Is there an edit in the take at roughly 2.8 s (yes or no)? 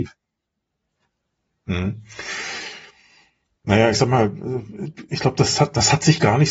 no